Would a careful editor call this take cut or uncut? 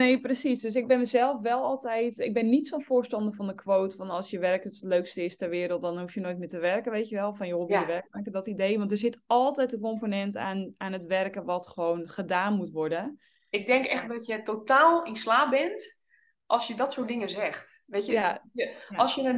uncut